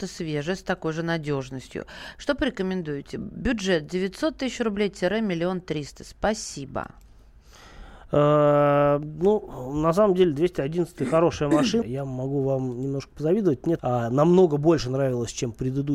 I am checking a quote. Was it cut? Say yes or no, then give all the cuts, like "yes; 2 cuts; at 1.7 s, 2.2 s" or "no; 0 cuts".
yes; 2 cuts; at 11.8 s, 13.8 s